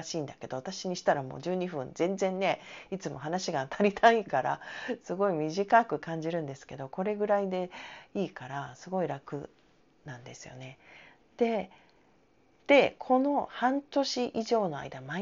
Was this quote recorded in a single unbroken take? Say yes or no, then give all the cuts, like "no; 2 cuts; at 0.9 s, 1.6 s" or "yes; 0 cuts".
yes; 0 cuts